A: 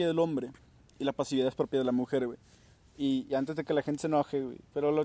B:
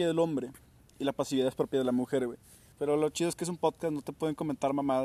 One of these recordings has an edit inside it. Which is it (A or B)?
B